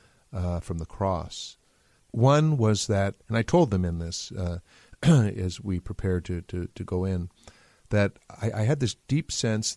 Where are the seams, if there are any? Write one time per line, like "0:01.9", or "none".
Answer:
0:02.0